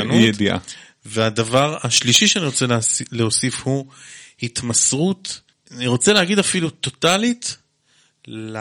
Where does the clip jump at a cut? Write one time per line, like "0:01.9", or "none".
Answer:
none